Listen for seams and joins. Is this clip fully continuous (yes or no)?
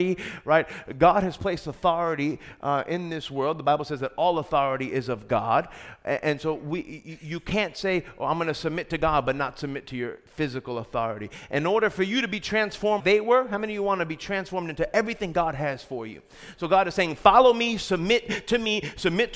no